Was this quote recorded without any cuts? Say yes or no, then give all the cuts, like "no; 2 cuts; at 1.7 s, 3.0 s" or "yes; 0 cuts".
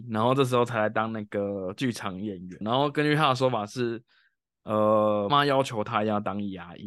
no; 2 cuts; at 2.6 s, 5.3 s